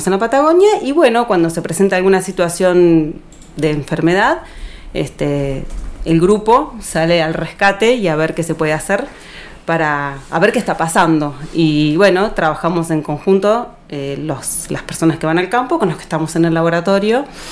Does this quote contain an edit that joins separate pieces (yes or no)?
no